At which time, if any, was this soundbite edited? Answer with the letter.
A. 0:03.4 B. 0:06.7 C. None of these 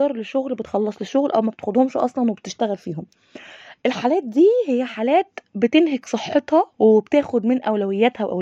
B